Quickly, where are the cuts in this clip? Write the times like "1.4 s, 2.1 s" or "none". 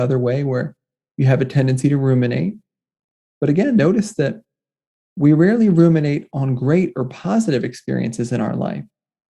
none